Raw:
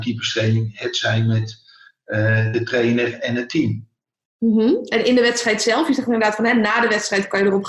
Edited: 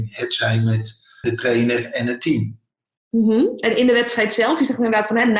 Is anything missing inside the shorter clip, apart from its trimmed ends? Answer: yes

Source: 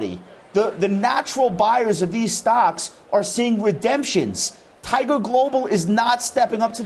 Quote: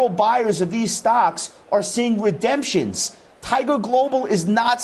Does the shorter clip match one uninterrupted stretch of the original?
yes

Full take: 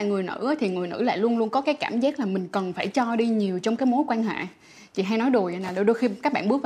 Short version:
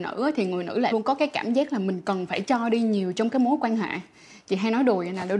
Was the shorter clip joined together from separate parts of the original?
yes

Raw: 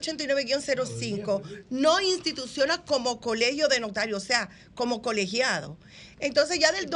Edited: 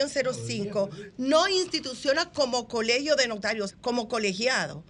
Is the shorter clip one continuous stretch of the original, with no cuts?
no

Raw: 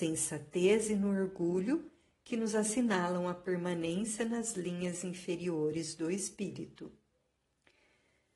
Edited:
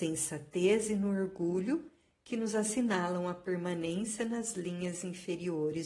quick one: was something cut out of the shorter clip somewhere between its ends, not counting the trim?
no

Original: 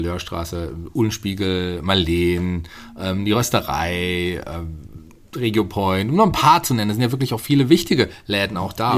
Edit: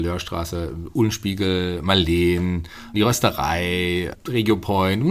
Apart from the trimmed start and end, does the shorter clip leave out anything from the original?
yes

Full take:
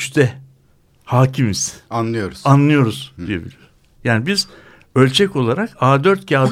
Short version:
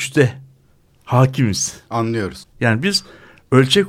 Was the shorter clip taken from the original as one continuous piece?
no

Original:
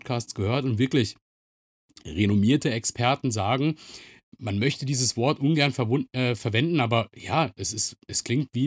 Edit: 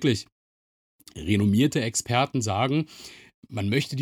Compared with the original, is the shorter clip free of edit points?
yes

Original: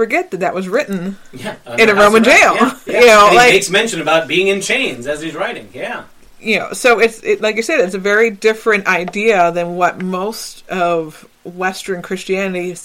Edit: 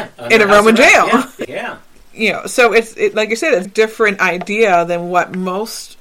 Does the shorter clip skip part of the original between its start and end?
yes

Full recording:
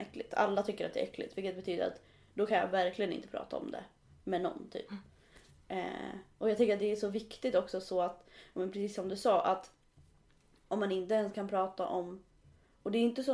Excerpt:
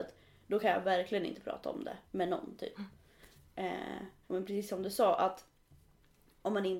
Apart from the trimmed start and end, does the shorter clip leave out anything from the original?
yes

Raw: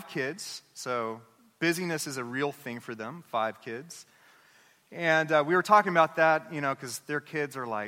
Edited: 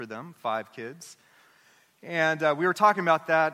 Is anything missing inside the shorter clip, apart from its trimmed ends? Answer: no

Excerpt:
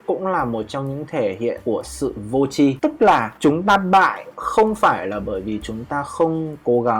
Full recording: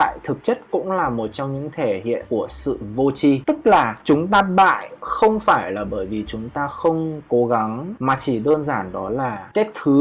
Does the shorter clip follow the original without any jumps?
yes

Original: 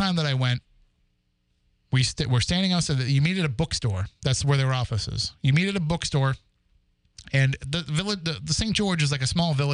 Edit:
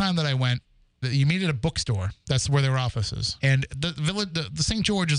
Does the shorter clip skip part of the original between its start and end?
yes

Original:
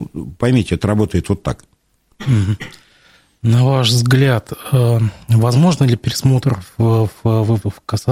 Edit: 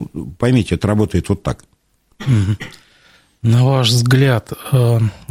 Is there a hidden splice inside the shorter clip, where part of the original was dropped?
no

